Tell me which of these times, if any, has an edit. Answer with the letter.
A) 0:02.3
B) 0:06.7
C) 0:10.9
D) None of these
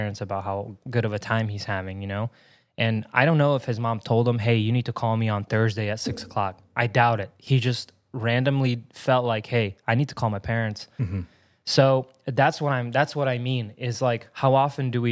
D